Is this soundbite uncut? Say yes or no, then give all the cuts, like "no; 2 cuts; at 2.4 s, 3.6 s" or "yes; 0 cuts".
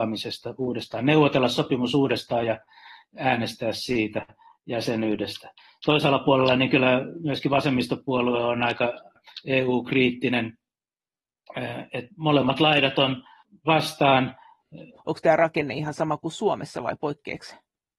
no; 1 cut; at 15.0 s